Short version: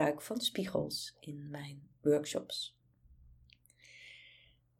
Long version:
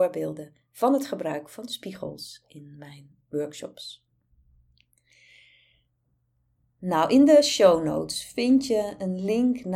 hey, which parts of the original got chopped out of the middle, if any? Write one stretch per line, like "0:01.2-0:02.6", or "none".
none